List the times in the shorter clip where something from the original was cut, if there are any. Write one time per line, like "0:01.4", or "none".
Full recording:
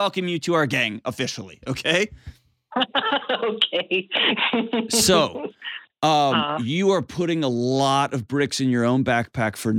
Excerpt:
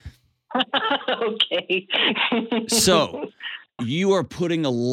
0:03.8